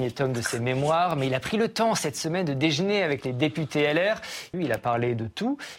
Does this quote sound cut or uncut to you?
cut